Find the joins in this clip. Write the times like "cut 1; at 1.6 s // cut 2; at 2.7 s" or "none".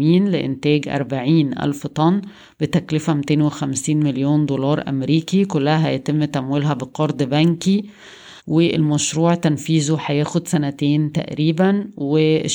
cut 1; at 8.4 s